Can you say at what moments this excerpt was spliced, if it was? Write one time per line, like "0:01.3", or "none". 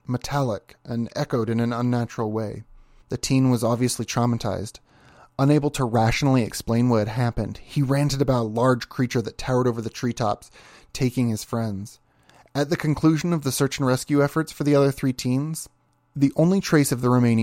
0:03.0